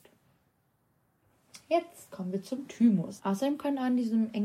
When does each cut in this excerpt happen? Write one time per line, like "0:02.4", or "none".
0:03.2

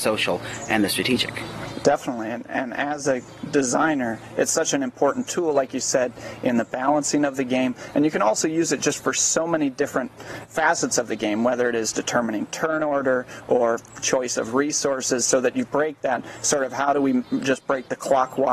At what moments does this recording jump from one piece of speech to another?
none

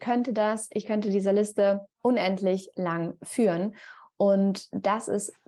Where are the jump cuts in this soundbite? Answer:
0:01.9

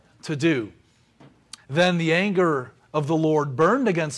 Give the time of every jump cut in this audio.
0:01.6

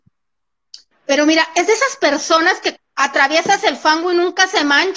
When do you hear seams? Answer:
0:00.9
0:02.8

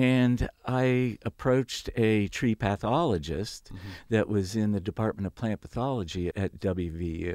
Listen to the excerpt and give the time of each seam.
0:06.3

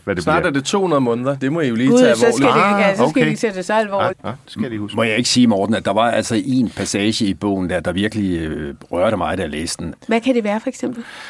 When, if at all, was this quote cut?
0:04.1
0:09.9

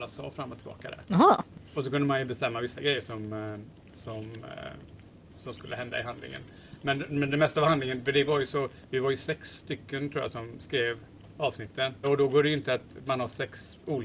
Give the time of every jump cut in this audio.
0:12.0

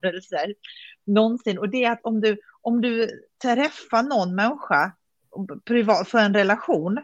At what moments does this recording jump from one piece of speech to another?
none

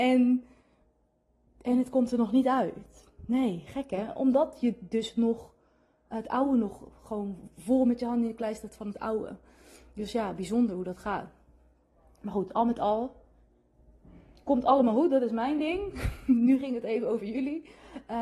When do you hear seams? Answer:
none

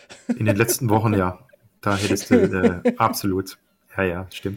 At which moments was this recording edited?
none

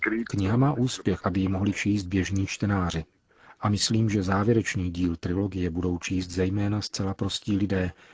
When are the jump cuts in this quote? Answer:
0:01.2

